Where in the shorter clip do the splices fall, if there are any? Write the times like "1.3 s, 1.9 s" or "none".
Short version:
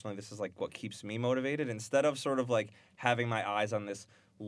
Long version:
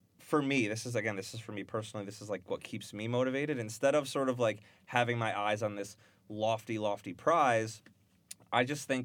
none